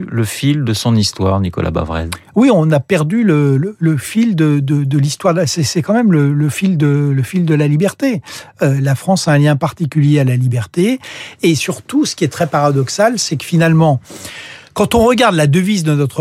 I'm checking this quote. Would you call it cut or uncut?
uncut